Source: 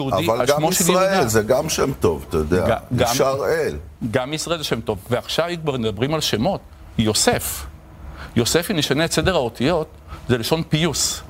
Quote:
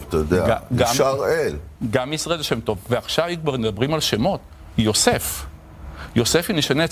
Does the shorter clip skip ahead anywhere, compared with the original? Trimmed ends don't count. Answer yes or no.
no